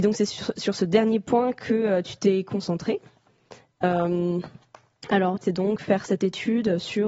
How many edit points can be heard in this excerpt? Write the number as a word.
one